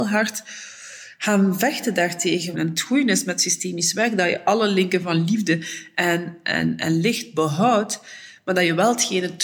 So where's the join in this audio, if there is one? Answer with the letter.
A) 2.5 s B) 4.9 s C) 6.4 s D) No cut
A